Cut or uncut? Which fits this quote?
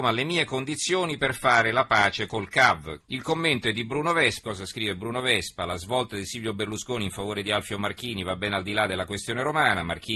cut